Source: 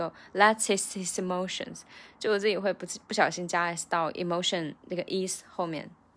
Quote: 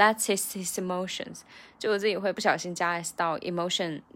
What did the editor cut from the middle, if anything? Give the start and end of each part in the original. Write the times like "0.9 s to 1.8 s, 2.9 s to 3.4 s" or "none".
2.7 s to 3.1 s